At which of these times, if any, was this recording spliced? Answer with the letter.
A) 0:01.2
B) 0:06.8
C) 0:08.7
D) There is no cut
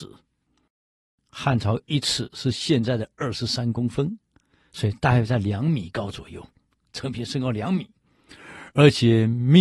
D